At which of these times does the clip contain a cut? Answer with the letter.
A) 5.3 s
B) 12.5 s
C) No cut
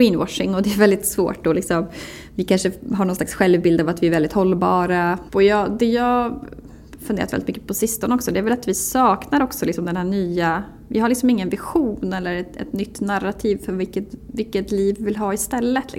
A